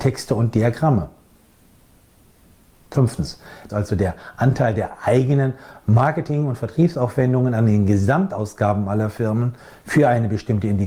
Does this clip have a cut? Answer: yes; 1 cut; at 3.7 s

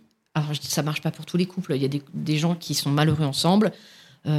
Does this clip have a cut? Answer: no; 0 cuts

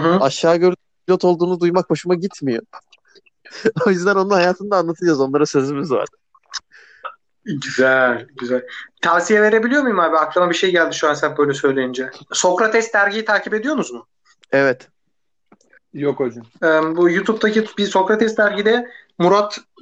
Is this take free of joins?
no; 2 cuts; at 12.3 s, 15.8 s

